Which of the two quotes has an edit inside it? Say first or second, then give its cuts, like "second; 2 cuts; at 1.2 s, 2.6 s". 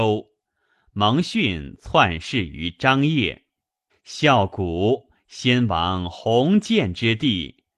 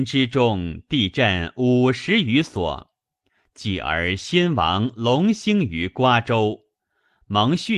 first; 1 cut; at 3.9 s